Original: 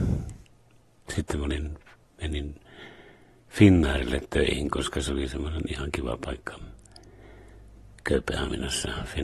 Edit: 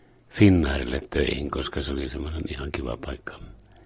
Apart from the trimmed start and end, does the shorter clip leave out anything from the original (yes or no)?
no